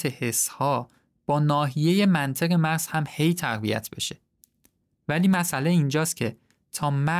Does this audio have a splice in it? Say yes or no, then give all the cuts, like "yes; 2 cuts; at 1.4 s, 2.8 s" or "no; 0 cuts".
yes; 1 cut; at 4.9 s